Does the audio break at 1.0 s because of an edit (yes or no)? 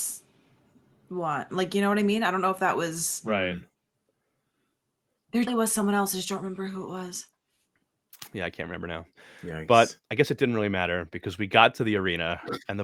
no